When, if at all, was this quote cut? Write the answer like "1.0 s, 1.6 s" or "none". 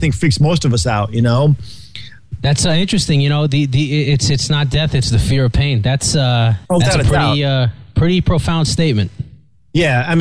6.6 s